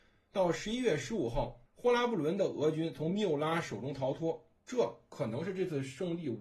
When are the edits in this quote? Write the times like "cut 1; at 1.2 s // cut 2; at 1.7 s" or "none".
cut 1; at 1.7 s // cut 2; at 4.6 s